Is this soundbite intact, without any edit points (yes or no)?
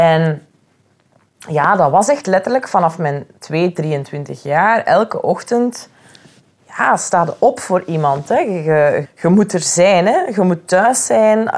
no